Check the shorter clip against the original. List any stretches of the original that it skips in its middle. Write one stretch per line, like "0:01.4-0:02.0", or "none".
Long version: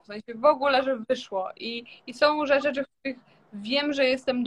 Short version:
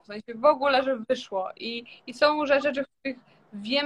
none